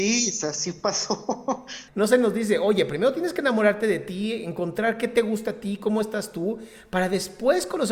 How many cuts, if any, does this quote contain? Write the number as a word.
one